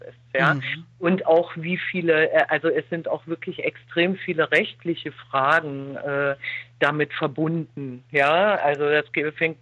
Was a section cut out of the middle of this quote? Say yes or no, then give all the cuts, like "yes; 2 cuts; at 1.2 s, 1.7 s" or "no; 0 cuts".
no; 0 cuts